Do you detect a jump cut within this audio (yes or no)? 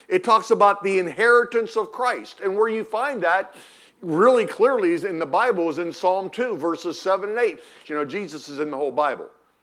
yes